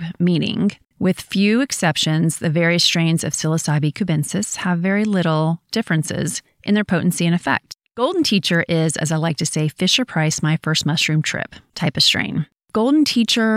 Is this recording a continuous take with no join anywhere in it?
yes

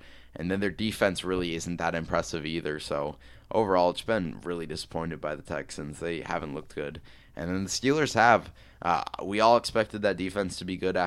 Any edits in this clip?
no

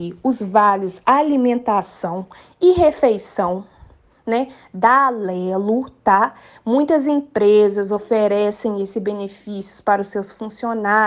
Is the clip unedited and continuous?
yes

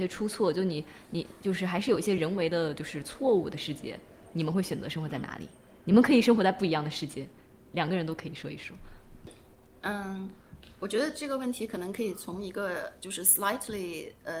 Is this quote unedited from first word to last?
yes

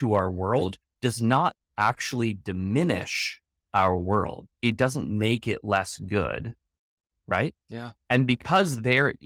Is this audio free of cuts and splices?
no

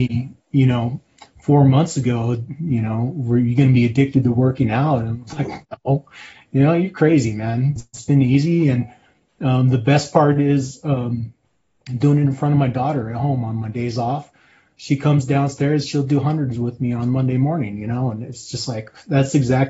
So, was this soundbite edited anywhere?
yes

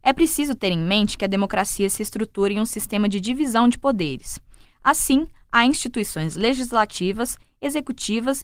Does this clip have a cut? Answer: no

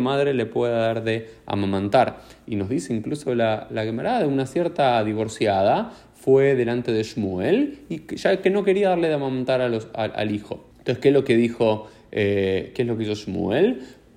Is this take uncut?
no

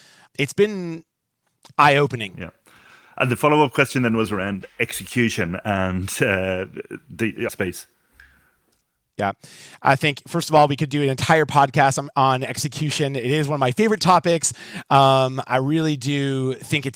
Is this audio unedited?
no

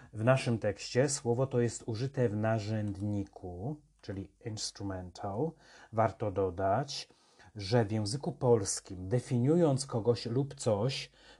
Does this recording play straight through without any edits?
yes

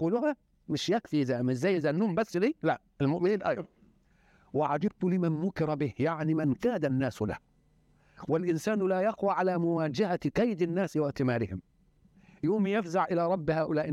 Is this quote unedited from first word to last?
yes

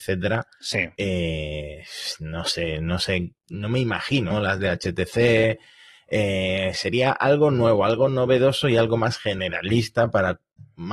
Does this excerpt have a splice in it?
yes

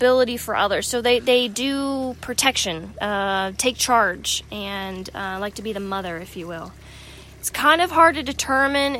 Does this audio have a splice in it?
no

